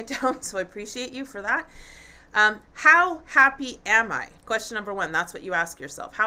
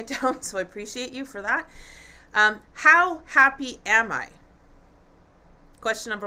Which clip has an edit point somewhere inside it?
first; 1 cut; at 4.4 s

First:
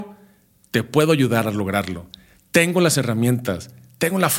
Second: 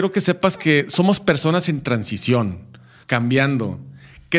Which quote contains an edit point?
second; 1 cut; at 3.0 s

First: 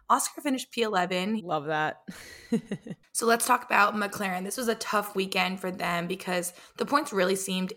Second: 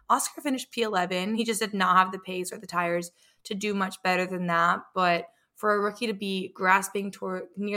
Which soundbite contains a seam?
first; 1 cut; at 1.4 s

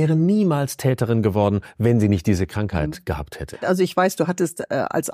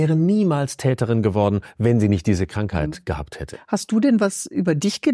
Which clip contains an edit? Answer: first; 1 cut; at 3.6 s

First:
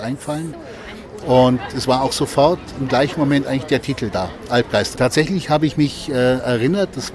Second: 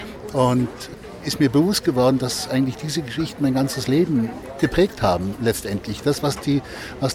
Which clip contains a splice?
first; 2 cuts; at 1.2 s, 4.9 s

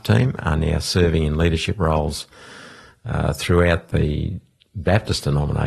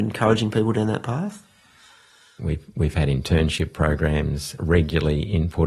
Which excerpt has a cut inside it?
second; 2 cuts; at 2.4 s, 4.6 s

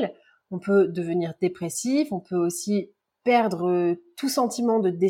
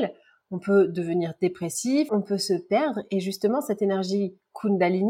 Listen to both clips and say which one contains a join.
second; 1 cut; at 2.1 s

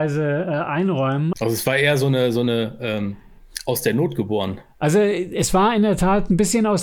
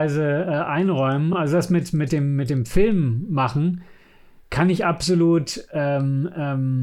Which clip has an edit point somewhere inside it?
first; 1 cut; at 1.3 s

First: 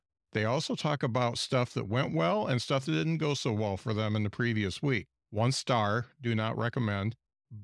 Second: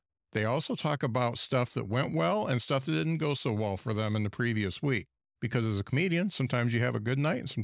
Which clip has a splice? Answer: first; 1 cut; at 5.2 s

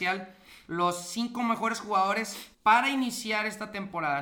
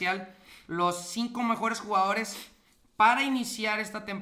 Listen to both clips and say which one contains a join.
first; 1 cut; at 2.5 s

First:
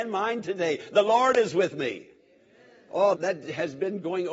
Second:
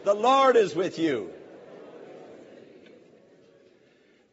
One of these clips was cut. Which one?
first; 1 cut; at 3.1 s

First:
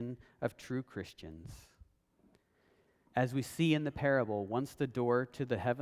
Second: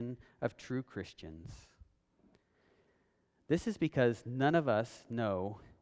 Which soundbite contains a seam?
first; 1 cut; at 3.0 s

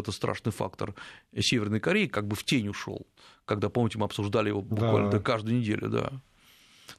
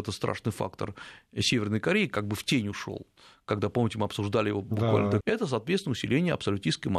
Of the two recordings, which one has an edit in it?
second; 1 cut; at 5.2 s

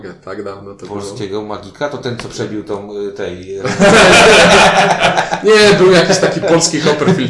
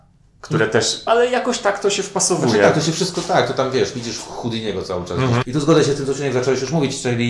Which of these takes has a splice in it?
second; 2 cuts; at 1.1 s, 5.4 s

